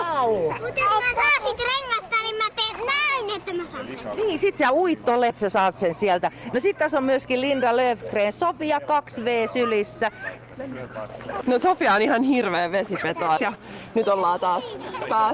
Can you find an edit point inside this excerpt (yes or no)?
yes